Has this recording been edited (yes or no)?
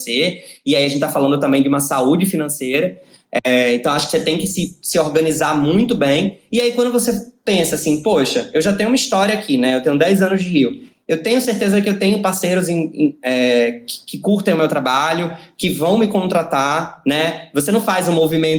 no